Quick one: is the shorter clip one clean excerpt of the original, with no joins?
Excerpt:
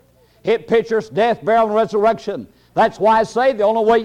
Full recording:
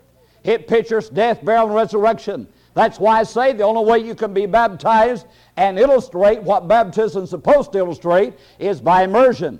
yes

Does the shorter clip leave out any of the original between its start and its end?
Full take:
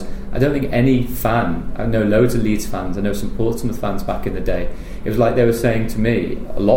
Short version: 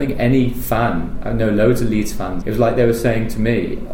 yes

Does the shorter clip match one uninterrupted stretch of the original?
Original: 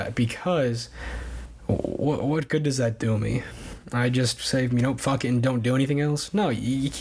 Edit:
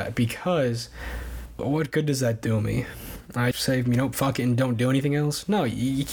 no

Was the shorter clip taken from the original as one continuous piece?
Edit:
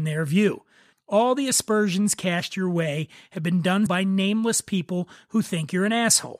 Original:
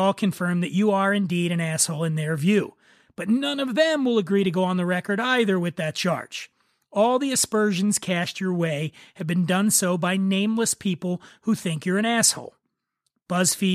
no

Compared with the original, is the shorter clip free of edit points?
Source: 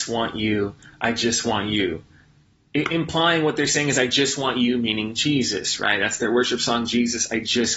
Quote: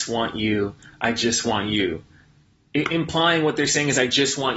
yes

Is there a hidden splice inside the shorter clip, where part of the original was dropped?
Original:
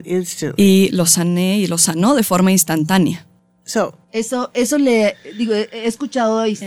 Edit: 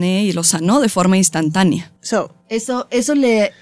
yes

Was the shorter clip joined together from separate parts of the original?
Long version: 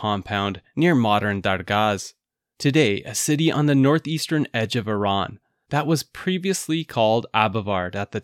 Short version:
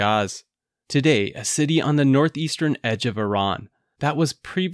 no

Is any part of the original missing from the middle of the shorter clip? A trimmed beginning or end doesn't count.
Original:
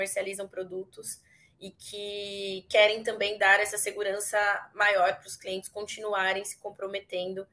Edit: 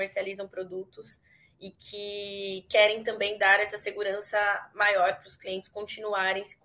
no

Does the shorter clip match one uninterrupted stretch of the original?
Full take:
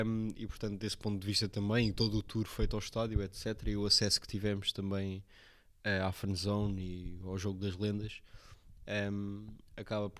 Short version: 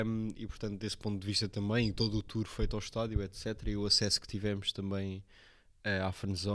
yes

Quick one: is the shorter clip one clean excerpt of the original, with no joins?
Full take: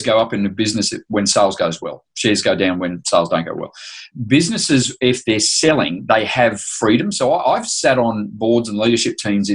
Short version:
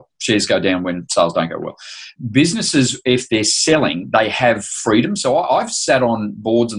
yes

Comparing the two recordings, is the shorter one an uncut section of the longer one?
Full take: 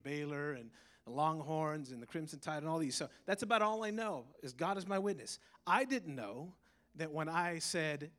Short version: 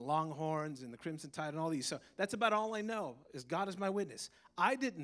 yes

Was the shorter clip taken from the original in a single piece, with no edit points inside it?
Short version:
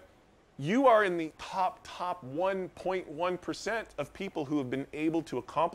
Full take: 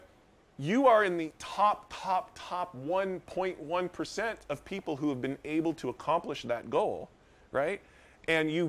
no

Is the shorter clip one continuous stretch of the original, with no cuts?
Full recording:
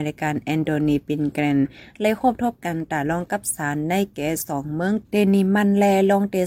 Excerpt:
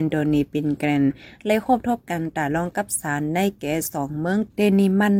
yes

